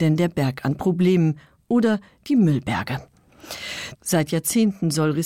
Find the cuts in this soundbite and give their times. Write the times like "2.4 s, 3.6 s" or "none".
3.9 s